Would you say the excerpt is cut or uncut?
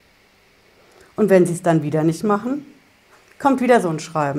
uncut